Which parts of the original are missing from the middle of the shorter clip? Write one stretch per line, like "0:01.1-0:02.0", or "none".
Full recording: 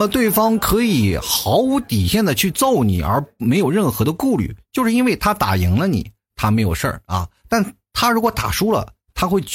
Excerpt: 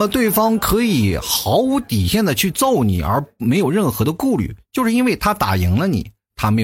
none